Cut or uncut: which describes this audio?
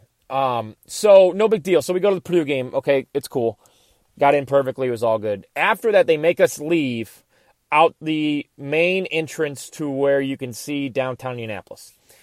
uncut